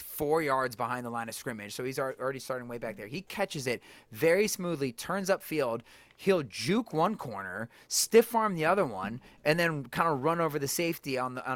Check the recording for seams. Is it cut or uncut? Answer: uncut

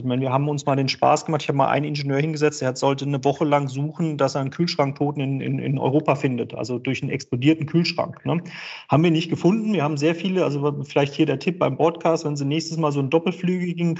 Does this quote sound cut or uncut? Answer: uncut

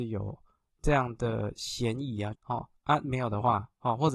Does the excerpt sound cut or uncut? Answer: cut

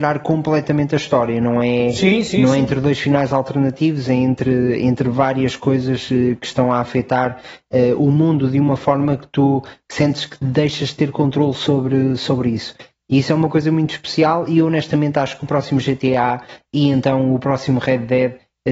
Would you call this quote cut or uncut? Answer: uncut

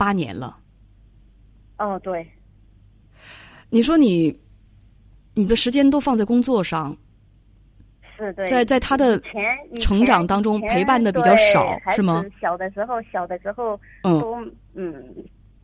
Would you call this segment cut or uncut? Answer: uncut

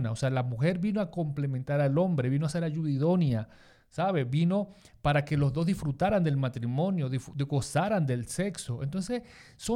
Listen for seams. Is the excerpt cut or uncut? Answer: uncut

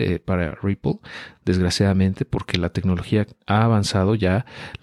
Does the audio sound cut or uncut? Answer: uncut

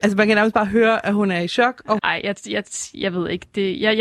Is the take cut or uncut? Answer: cut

